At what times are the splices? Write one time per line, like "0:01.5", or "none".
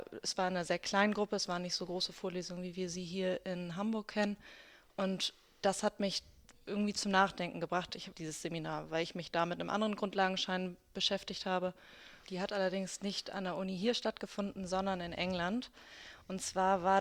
0:08.1
0:12.2